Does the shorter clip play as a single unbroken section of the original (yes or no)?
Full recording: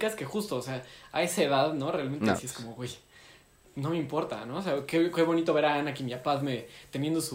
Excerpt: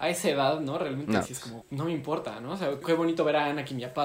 no